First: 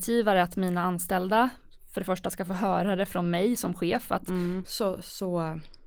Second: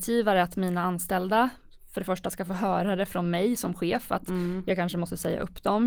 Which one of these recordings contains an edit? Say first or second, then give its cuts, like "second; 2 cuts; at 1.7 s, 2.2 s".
first; 1 cut; at 4.6 s